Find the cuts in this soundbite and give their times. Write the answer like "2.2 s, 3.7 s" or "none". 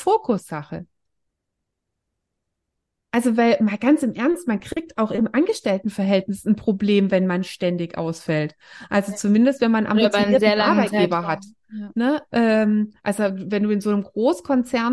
none